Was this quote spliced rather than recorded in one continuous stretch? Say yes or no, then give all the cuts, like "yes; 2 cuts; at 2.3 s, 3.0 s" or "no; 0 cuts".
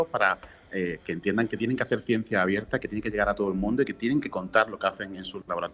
yes; 1 cut; at 1.0 s